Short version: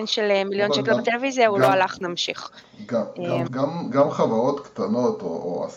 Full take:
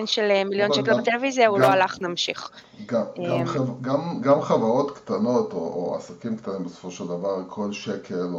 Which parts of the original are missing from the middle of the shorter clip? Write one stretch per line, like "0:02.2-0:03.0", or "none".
0:03.5-0:03.8